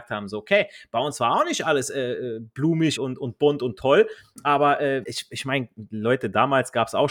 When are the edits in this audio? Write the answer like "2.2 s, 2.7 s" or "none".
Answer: 3.0 s, 5.0 s